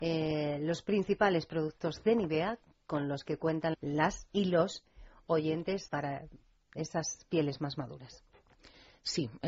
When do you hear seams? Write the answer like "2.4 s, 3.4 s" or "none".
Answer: 3.7 s, 5.9 s

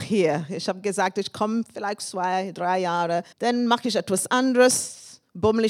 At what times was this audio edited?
3.3 s

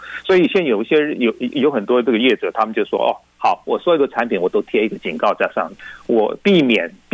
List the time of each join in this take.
none

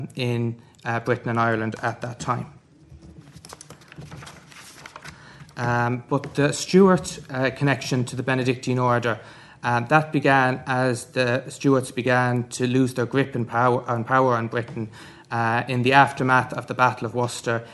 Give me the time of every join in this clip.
none

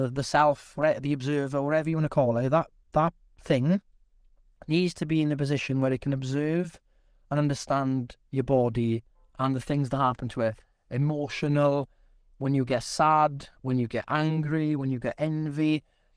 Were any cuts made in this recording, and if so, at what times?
none

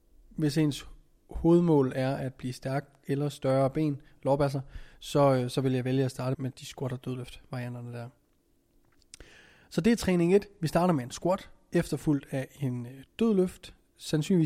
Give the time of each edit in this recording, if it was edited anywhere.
6.3 s

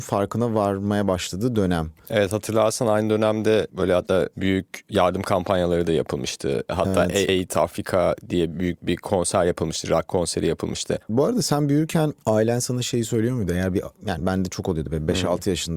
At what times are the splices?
11.1 s

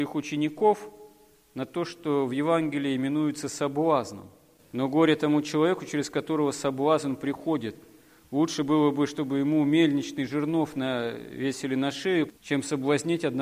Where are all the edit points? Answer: 4.6 s, 12.3 s

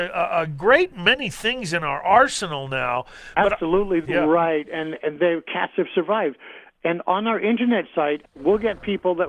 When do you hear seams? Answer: 4.0 s, 8.2 s

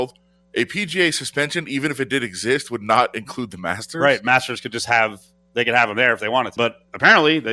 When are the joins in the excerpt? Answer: 6.6 s

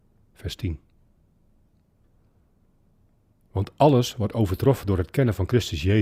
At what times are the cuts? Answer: 3.4 s

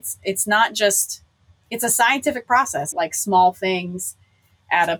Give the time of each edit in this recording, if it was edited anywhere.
2.9 s

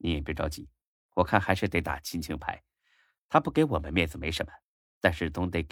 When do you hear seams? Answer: none

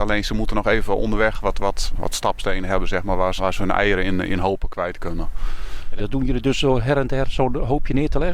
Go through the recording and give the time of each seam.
2.0 s, 3.4 s, 6.0 s

